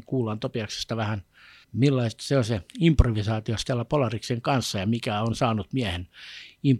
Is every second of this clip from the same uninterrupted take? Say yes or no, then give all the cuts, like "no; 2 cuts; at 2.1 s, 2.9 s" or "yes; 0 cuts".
no; 1 cut; at 1.6 s